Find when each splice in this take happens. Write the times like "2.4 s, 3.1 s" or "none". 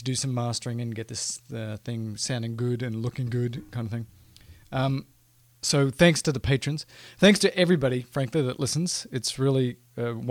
none